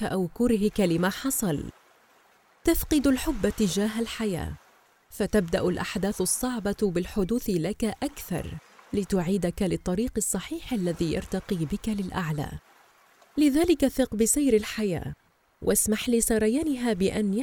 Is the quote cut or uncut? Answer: uncut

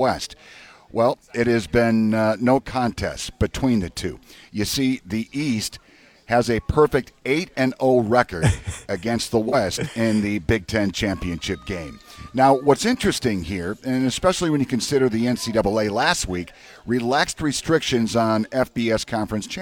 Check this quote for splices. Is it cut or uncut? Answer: uncut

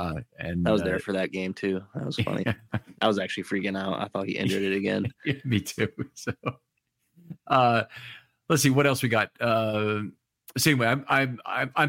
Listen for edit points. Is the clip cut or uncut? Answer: uncut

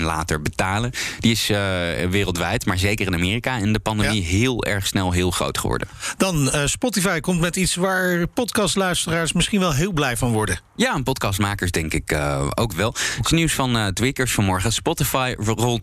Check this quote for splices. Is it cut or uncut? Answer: uncut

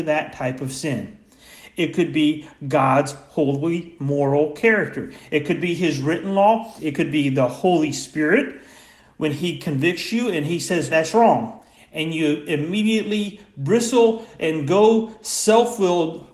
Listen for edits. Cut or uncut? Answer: cut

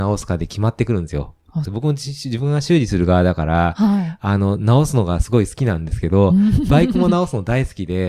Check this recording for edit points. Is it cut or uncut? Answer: cut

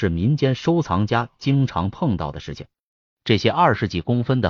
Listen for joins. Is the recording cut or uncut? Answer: cut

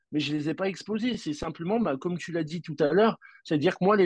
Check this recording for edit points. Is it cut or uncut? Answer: uncut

